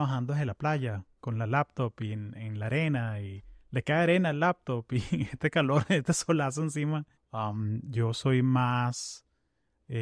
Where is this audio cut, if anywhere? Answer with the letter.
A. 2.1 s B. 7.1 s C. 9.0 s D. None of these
B